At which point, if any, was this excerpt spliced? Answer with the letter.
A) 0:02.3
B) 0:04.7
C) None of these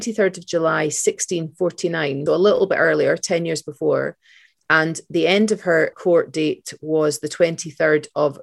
A